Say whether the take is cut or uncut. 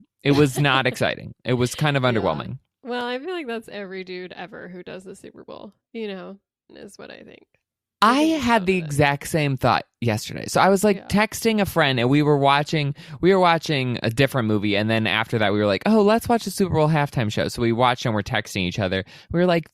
cut